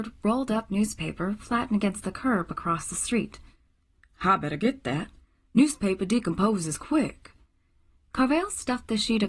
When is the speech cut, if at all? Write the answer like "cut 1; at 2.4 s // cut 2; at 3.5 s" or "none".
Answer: none